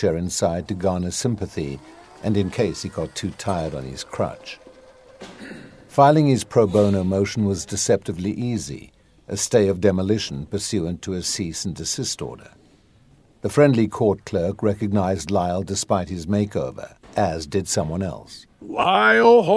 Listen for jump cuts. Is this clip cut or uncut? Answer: cut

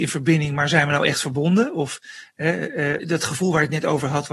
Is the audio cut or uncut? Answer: cut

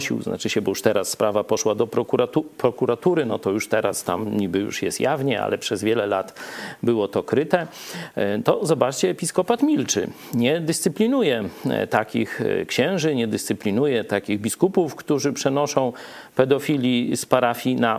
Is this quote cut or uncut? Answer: uncut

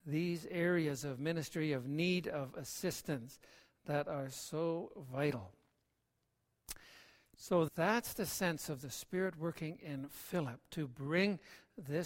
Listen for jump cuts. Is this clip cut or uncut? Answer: cut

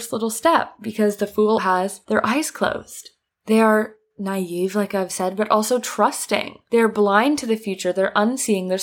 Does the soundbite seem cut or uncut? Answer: cut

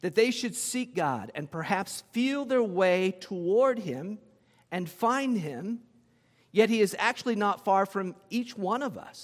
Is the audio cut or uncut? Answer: uncut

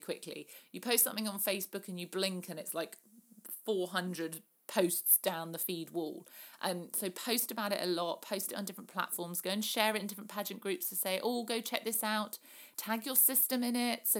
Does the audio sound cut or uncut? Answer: uncut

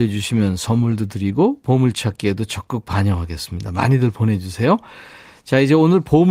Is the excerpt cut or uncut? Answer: uncut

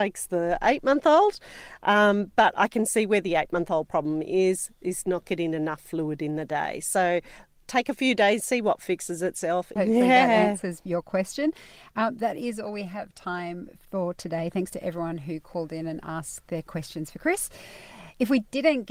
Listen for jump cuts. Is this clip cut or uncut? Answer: cut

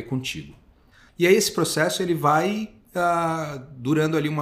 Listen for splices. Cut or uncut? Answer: cut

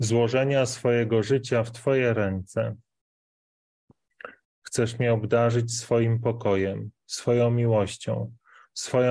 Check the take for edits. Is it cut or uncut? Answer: cut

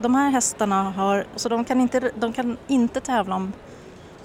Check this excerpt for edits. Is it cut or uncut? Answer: cut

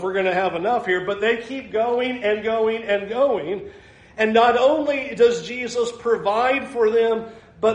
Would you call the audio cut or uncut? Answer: uncut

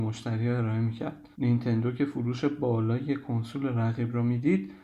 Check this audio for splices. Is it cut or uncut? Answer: cut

